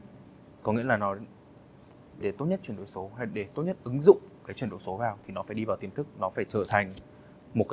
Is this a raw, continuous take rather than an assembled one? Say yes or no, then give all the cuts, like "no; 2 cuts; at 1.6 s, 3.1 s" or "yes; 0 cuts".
no; 1 cut; at 2.2 s